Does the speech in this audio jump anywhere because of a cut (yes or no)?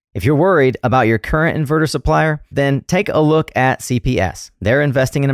yes